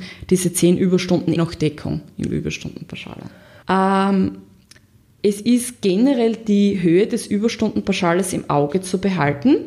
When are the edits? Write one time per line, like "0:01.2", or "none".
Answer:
0:01.4
0:03.6